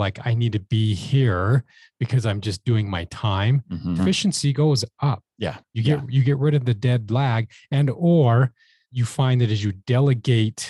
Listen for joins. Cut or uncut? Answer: cut